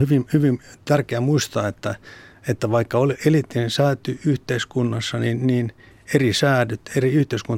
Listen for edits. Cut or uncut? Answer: uncut